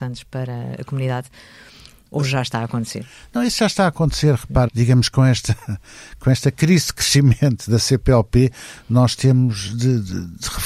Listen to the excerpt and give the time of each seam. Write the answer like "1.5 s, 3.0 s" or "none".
4.7 s